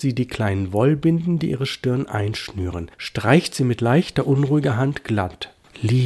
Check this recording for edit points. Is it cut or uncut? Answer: uncut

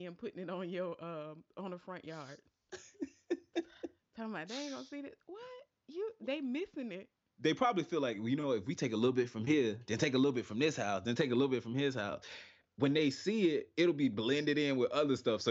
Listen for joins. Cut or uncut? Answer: uncut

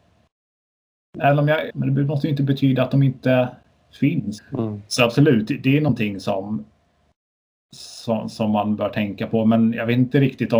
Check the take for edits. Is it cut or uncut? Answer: cut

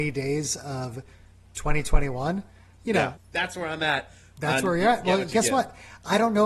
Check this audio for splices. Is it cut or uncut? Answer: cut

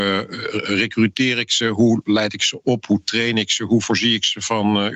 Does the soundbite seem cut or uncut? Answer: uncut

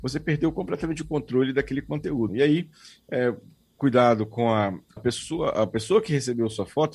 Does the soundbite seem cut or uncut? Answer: cut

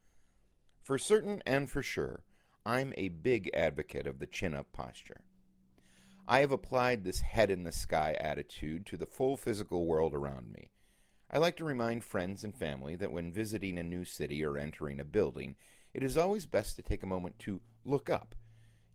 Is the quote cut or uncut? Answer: uncut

